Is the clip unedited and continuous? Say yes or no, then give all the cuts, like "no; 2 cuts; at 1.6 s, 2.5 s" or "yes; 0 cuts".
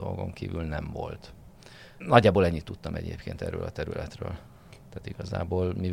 no; 2 cuts; at 2.0 s, 4.8 s